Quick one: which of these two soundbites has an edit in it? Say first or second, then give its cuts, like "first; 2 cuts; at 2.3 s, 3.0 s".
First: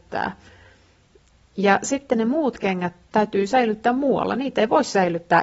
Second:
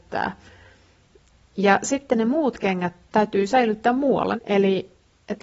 second; 1 cut; at 4.3 s